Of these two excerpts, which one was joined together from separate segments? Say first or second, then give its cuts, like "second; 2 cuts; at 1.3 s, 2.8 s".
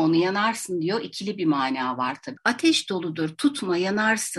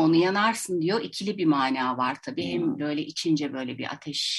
first; 1 cut; at 2.4 s